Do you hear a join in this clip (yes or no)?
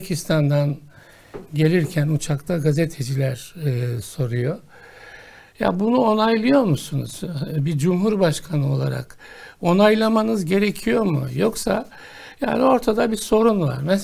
yes